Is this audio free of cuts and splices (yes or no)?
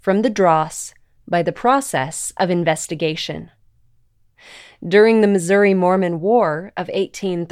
yes